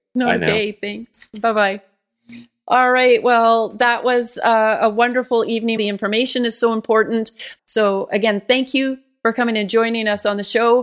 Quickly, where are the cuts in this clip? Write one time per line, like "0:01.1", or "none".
0:05.8
0:07.6